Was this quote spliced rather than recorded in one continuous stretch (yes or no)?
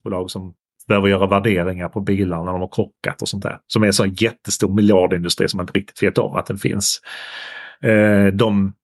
no